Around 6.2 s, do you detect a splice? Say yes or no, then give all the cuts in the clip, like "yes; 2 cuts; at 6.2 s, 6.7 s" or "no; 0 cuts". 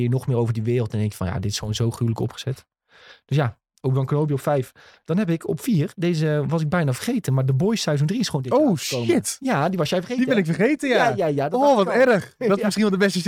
no; 0 cuts